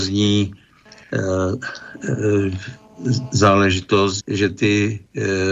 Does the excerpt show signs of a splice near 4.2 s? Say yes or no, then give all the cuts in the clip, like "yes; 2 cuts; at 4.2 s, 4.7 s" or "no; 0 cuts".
yes; 1 cut; at 4.2 s